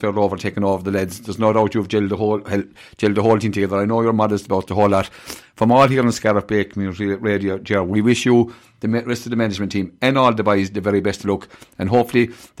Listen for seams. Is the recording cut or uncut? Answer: uncut